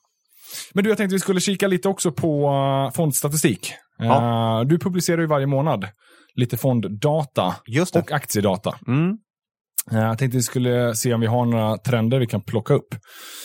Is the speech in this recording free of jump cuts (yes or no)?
yes